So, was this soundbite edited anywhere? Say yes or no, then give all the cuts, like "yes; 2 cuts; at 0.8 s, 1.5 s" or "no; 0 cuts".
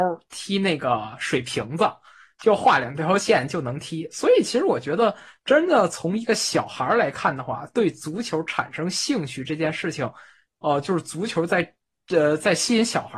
no; 0 cuts